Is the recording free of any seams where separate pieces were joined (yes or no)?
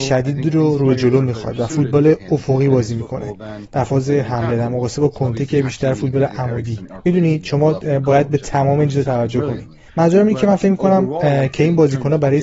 no